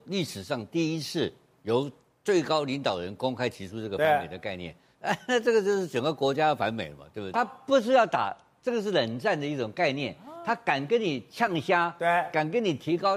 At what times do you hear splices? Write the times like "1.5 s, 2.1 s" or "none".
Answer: 7.3 s